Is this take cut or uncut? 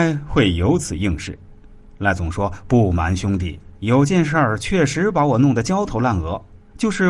uncut